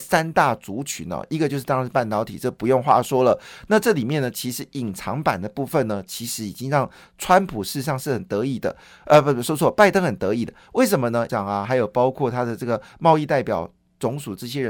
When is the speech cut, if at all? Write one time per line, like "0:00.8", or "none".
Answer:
0:11.3